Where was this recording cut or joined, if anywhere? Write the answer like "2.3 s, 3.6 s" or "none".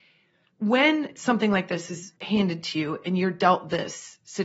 2.2 s

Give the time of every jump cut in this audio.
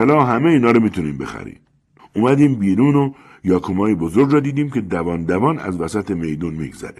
2.0 s

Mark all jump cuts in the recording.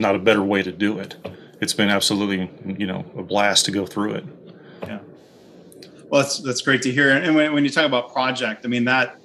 none

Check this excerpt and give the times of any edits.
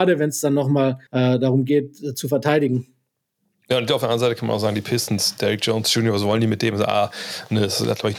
1.1 s

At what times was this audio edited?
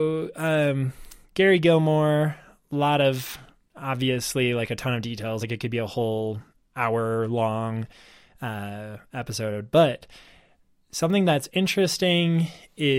none

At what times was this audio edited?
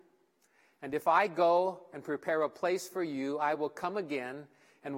none

